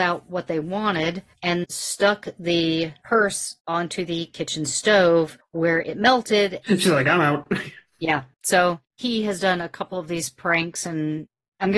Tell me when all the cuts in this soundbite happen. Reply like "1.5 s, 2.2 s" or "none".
1.6 s, 6.6 s